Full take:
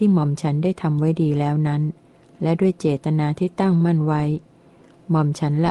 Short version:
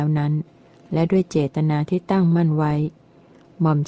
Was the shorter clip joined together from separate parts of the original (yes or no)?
no